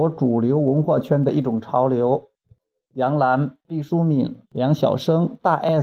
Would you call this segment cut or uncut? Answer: cut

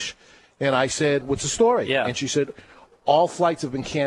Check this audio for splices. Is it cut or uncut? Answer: cut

